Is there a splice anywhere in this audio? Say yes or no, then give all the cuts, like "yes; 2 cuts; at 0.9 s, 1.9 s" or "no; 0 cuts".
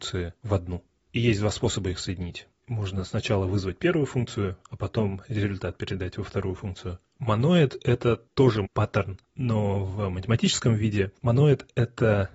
yes; 2 cuts; at 7.0 s, 8.7 s